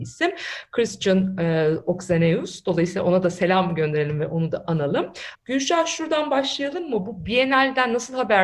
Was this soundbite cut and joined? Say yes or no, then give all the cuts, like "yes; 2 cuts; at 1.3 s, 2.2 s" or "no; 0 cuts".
yes; 1 cut; at 5.4 s